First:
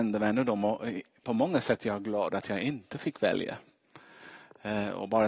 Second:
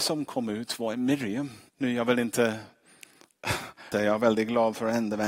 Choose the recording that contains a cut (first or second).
second